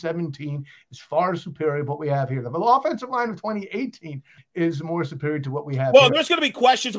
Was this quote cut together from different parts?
yes; 1 cut; at 4.4 s

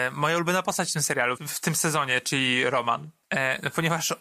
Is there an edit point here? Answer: yes; 1 cut; at 1.4 s

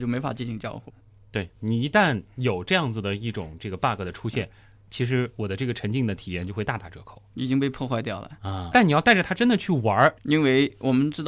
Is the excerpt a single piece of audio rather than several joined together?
no; 2 cuts; at 8.7 s, 10.2 s

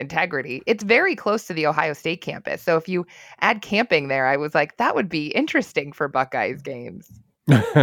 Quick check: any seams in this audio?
no; 0 cuts

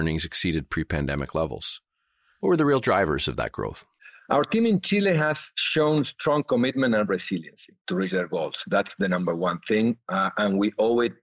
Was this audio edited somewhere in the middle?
no; 0 cuts

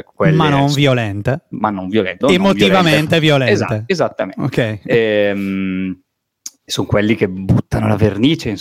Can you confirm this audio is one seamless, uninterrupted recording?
no; 1 cut; at 2.2 s

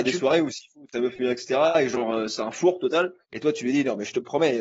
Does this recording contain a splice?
yes; 1 cut; at 3.2 s

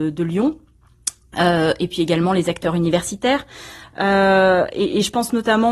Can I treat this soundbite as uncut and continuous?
no; 1 cut; at 3.8 s

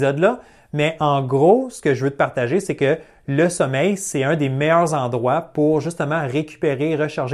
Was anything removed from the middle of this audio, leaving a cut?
no; 0 cuts

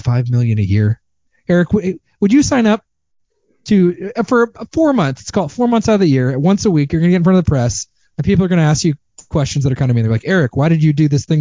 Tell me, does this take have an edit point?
no; 0 cuts

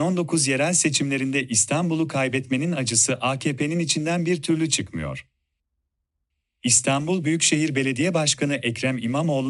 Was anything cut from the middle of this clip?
no; 0 cuts

